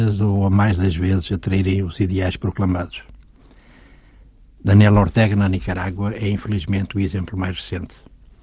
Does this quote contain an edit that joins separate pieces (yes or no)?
no